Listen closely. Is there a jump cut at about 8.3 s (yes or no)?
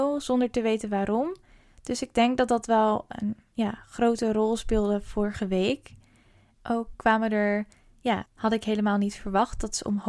yes